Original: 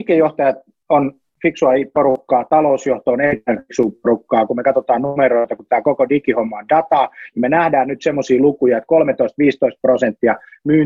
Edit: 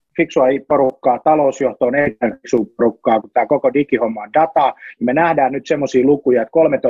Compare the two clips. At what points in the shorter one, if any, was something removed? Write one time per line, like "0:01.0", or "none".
0:03.2